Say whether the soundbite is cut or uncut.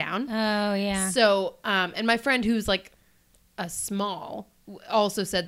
uncut